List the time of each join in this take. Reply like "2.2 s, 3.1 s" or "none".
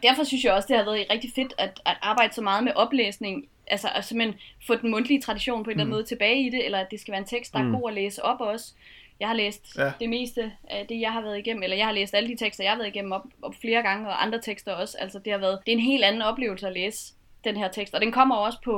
15.6 s